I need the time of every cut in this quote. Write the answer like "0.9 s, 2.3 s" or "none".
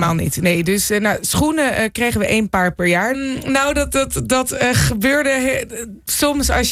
3.1 s